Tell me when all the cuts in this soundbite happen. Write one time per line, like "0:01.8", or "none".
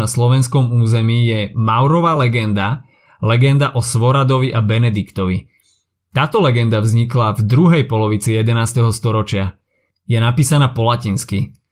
none